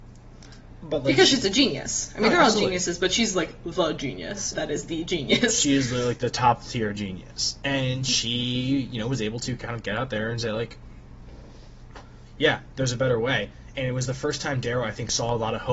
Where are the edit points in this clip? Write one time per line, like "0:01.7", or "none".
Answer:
0:04.5